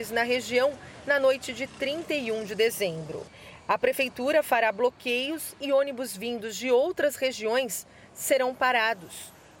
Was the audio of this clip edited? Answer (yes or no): no